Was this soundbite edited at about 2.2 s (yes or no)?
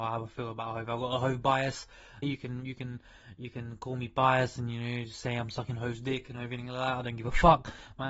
yes